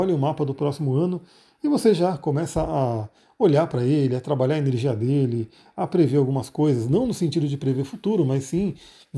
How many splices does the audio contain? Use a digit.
0